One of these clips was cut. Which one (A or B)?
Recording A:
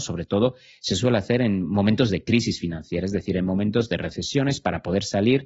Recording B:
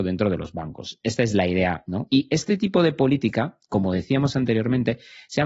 B